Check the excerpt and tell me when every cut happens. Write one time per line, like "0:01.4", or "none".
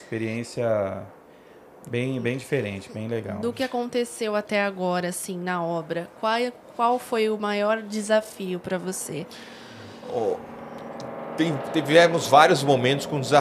none